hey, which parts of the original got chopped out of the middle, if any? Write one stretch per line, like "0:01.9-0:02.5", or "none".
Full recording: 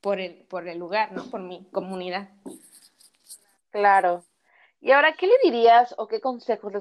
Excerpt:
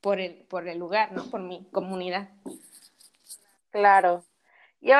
none